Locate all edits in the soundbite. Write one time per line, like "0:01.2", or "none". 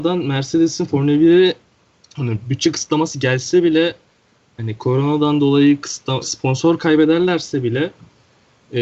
0:06.2